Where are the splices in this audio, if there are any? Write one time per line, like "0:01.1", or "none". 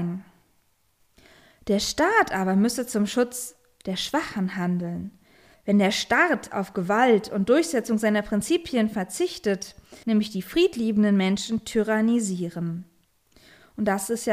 0:05.5
0:10.0